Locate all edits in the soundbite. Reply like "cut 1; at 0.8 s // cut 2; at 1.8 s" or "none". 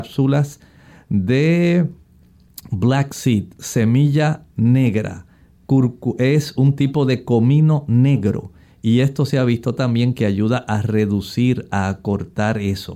none